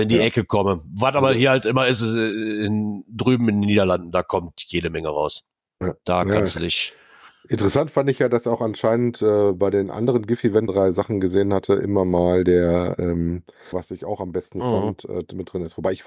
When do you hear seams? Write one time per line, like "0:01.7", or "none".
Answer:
0:10.7
0:13.7